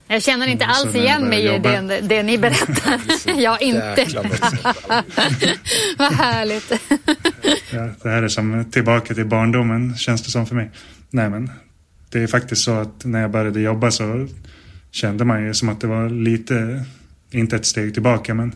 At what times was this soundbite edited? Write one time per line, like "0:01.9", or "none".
0:04.4
0:12.0